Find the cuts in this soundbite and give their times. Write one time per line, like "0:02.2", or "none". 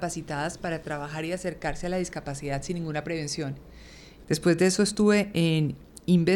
0:04.2